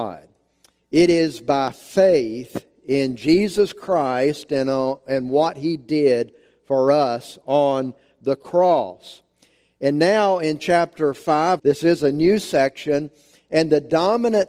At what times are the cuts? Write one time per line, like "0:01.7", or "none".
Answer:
0:11.6